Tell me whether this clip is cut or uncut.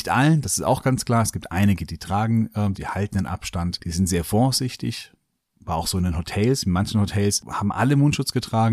cut